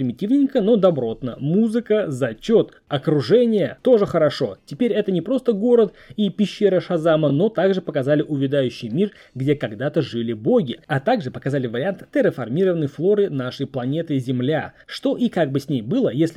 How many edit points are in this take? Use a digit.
0